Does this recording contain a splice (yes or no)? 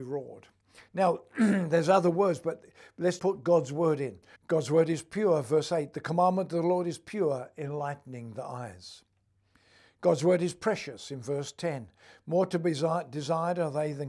yes